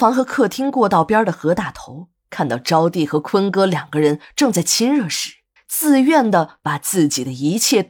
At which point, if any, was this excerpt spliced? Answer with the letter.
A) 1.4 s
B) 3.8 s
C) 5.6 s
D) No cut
C